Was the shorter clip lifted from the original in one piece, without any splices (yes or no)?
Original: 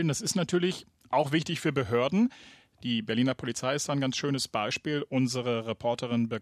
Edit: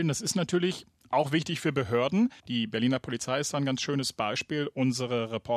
no